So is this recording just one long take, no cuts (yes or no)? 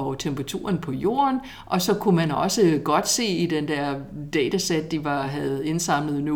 yes